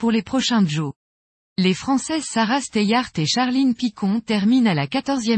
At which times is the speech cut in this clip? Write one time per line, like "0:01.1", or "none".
none